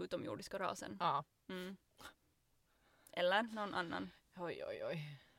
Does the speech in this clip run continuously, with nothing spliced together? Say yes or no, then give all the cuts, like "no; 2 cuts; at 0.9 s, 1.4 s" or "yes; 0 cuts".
yes; 0 cuts